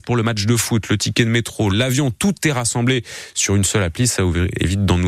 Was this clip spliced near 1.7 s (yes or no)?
yes